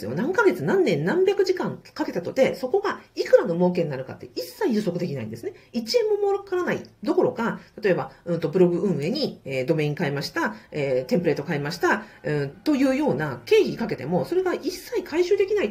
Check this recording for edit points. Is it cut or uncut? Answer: cut